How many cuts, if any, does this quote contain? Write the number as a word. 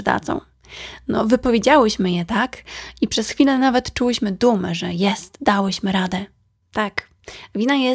one